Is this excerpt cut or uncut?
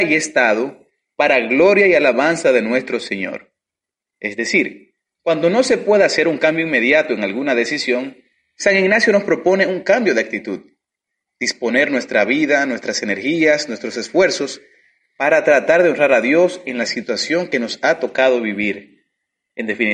uncut